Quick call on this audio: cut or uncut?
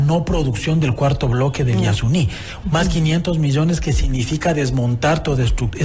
cut